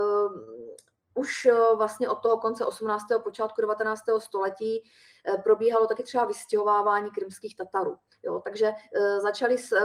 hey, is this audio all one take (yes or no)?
yes